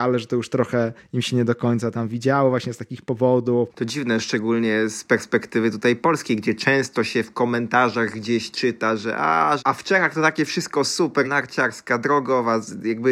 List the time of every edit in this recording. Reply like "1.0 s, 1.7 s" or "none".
3.7 s, 9.6 s, 11.2 s